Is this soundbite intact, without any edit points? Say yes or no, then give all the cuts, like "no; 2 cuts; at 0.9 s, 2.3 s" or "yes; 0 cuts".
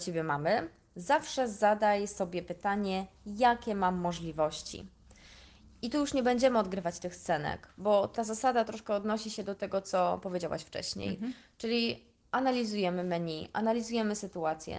yes; 0 cuts